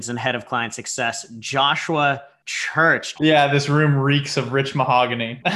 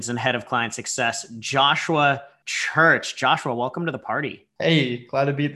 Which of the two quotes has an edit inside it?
first; 1 cut; at 3.1 s

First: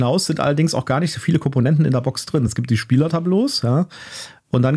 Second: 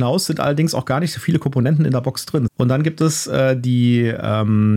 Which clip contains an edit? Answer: second; 1 cut; at 2.5 s

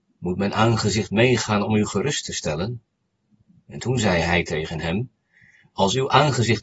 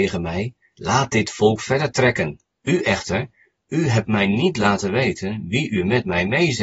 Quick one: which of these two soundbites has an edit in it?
second; 1 cut; at 2.6 s

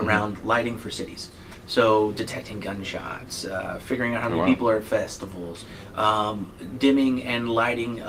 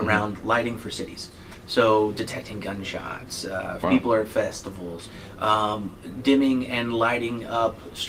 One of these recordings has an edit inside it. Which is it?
second; 1 cut; at 3.8 s

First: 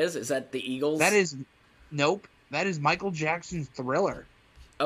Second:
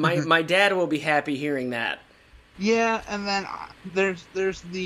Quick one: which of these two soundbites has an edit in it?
second; 1 cut; at 2.5 s

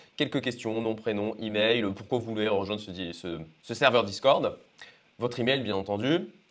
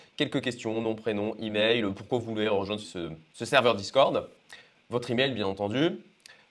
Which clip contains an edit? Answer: second; 1 cut; at 2.8 s

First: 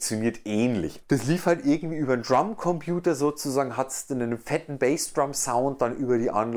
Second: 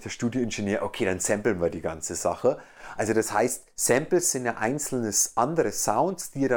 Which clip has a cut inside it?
first; 1 cut; at 1.0 s

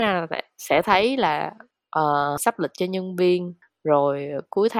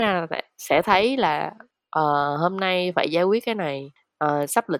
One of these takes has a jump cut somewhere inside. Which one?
first; 1 cut; at 2.4 s

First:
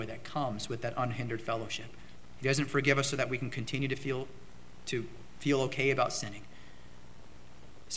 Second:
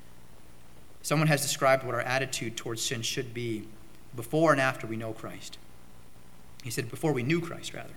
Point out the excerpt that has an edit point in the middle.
second; 1 cut; at 6.9 s

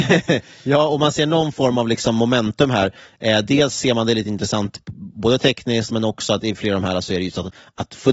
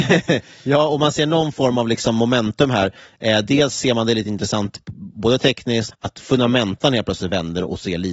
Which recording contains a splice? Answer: second; 1 cut; at 5.9 s

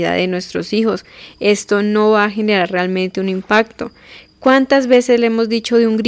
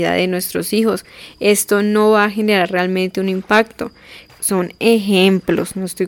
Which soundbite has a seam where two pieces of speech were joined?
second; 1 cut; at 4.3 s

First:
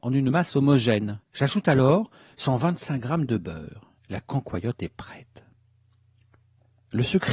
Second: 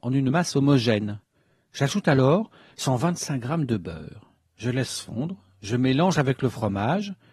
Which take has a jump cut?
first; 2 cuts; at 1.2 s, 4.0 s

